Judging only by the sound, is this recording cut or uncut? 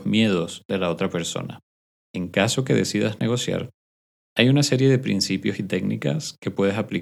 cut